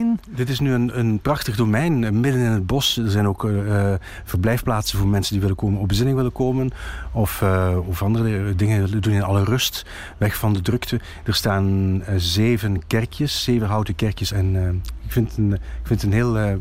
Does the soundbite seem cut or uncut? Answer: cut